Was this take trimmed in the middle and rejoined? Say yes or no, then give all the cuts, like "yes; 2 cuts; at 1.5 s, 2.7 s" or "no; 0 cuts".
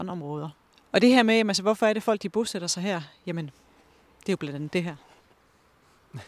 no; 0 cuts